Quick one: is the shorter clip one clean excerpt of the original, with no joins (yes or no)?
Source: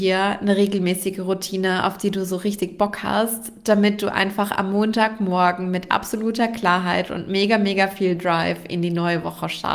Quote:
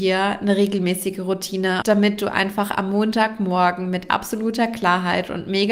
no